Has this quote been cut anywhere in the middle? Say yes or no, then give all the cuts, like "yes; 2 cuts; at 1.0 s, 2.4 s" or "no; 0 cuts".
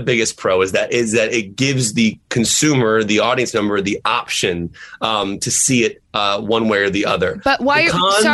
no; 0 cuts